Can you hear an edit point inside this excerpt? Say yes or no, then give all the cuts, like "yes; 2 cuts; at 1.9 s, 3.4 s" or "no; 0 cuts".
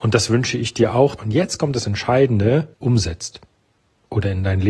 yes; 2 cuts; at 1.2 s, 2.7 s